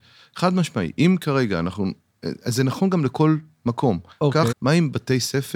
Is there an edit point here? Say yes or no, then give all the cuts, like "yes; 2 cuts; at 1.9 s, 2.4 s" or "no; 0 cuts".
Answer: yes; 1 cut; at 4.5 s